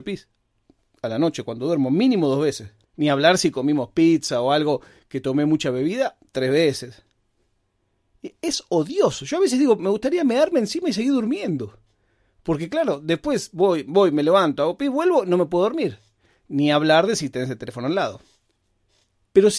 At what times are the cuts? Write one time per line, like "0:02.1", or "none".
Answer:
0:02.8